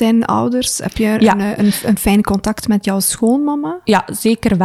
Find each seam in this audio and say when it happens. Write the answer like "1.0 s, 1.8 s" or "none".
none